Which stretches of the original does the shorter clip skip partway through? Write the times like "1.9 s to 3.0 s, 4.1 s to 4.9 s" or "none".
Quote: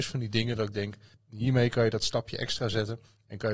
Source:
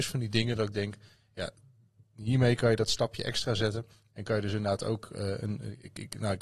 1.1 s to 2.0 s